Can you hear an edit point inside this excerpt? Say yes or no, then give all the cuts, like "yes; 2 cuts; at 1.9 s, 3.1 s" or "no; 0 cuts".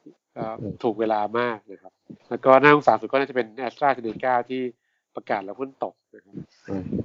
yes; 1 cut; at 2.2 s